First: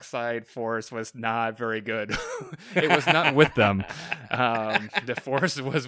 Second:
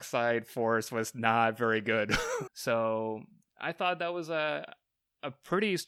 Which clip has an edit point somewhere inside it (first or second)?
second